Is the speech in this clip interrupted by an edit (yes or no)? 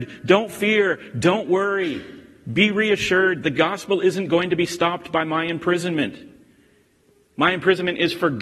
no